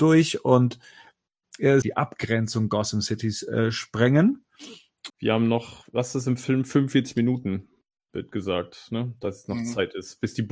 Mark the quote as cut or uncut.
cut